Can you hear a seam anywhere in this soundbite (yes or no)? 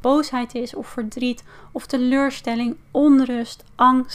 no